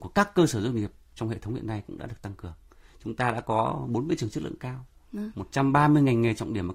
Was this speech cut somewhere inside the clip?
no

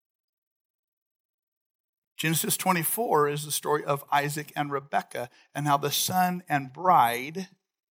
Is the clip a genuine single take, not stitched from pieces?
yes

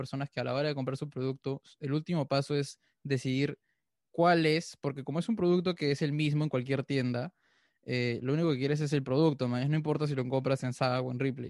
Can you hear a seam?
no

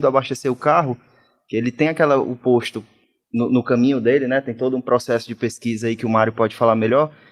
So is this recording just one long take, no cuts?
yes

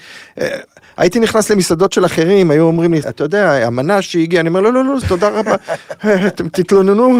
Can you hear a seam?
yes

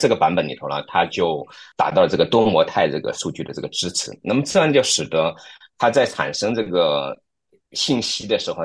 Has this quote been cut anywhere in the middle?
no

